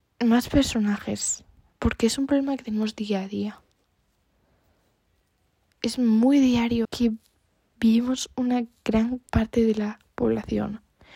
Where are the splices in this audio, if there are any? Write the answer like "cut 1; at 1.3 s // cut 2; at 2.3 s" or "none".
cut 1; at 6.8 s // cut 2; at 9.3 s